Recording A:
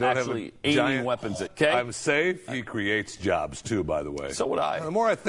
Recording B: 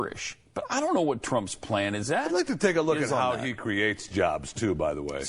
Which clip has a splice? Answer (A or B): A